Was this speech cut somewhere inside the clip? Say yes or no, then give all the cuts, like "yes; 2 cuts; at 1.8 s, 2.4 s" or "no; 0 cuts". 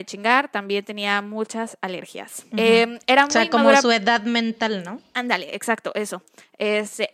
yes; 1 cut; at 2.5 s